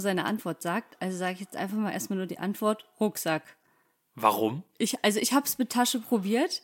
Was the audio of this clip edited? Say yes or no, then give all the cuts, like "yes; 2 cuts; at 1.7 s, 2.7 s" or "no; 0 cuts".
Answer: no; 0 cuts